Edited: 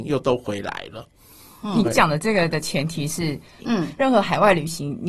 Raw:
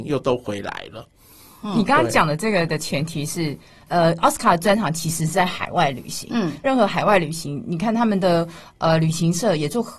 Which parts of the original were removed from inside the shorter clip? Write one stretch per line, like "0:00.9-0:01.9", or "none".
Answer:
0:01.8-0:02.0
0:03.8-0:06.2